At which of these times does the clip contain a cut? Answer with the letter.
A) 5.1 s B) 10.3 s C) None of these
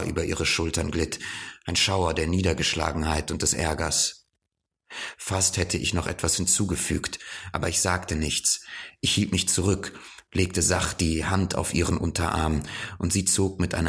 C